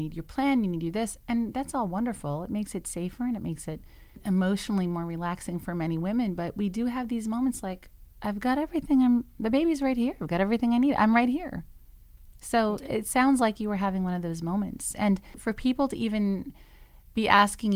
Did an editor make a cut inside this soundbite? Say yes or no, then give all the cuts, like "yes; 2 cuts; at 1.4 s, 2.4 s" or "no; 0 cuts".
no; 0 cuts